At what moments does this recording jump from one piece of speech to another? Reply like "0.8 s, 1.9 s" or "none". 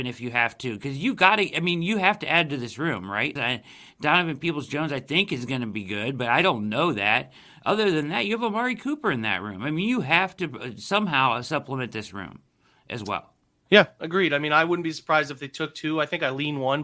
3.4 s